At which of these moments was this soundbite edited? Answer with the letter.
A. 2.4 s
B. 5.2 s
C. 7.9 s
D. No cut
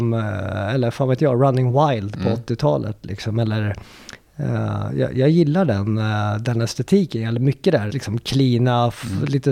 C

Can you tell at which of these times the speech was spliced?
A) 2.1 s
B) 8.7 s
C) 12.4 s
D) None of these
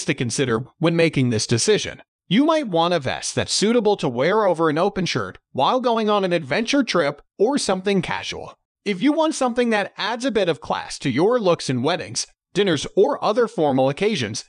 D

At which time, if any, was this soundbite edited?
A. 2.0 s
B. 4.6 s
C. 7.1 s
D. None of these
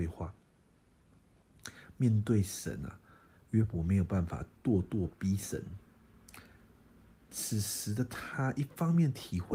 D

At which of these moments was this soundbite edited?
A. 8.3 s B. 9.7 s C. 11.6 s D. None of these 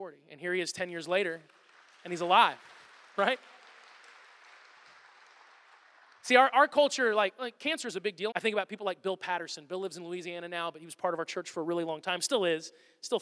A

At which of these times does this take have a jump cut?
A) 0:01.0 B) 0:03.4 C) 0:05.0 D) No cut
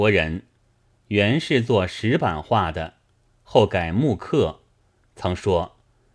C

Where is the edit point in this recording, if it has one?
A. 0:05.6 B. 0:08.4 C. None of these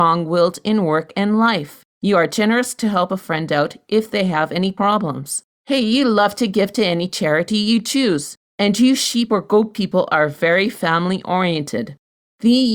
C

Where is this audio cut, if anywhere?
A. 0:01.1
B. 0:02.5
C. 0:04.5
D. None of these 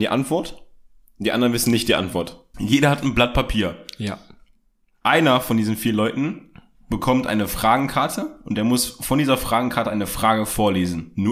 B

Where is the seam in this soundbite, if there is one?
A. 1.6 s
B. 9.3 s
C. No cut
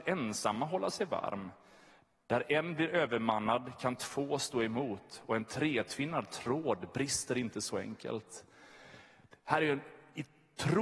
C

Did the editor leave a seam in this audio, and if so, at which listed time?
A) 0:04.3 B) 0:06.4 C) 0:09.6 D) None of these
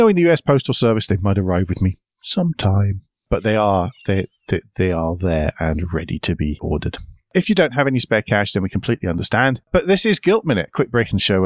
C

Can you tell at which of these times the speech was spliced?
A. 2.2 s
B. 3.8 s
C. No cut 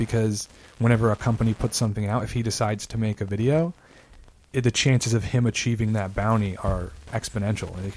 C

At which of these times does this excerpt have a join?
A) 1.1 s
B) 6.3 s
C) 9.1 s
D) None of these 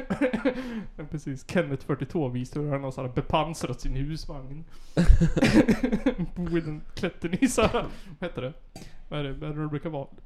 D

